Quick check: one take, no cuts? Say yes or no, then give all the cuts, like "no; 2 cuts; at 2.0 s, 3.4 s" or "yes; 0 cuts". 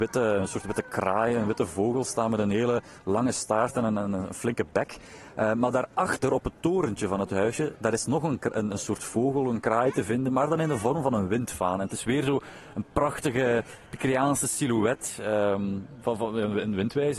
yes; 0 cuts